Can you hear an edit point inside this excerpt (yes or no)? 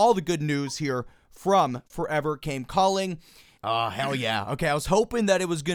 yes